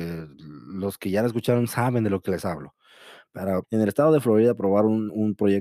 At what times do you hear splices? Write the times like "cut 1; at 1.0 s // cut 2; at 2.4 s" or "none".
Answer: cut 1; at 3.6 s

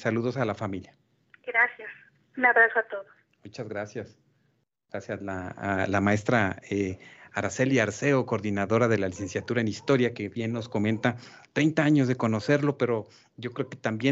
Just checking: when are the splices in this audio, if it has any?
none

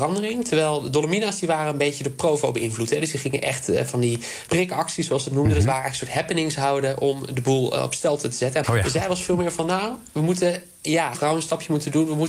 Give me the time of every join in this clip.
cut 1; at 4.5 s // cut 2; at 8.6 s // cut 3; at 11.1 s

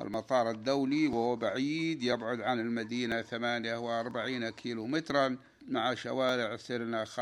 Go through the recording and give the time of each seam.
cut 1; at 5.6 s

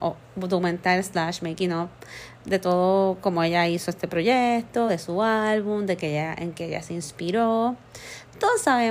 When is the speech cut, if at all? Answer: none

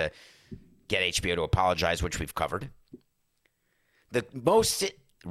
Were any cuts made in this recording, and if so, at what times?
none

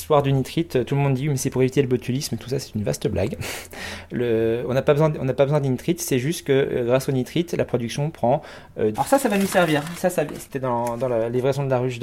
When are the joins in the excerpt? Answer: cut 1; at 8.9 s

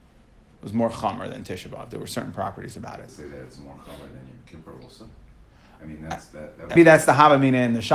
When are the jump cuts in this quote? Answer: cut 1; at 3.1 s // cut 2; at 6.8 s

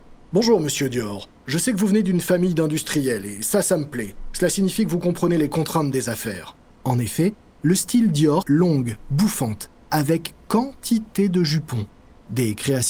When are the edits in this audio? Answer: cut 1; at 6.7 s // cut 2; at 8.4 s

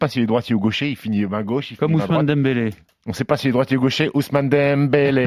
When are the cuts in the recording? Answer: none

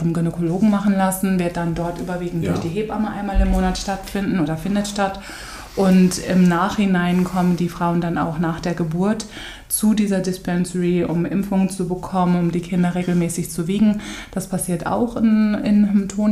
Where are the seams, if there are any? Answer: none

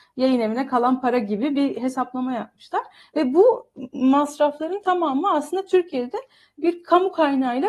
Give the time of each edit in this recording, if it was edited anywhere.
none

